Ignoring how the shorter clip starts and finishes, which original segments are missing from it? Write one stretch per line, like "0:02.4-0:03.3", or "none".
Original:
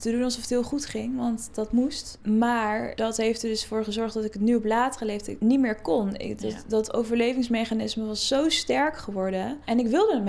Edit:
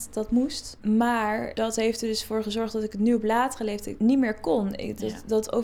none